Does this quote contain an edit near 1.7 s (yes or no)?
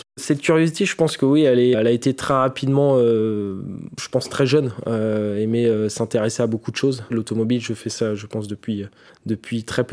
yes